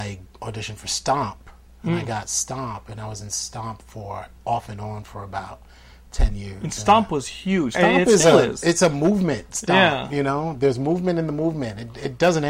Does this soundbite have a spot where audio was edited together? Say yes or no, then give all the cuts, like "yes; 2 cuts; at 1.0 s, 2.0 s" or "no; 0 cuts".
yes; 1 cut; at 7.7 s